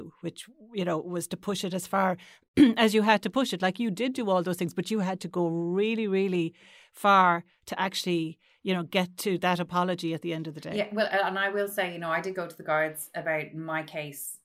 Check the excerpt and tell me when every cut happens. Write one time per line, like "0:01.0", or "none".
none